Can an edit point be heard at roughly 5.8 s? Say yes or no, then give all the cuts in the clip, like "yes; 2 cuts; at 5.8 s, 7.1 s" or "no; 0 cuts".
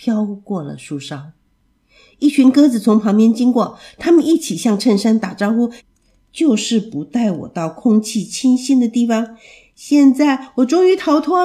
yes; 1 cut; at 5.8 s